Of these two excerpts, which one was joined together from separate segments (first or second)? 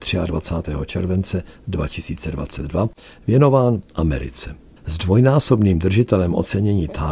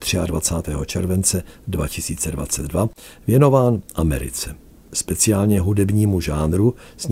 first